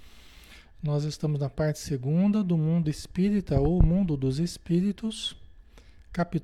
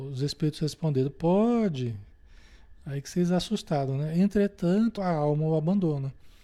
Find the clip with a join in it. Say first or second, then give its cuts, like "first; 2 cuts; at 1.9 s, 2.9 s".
second; 1 cut; at 5.0 s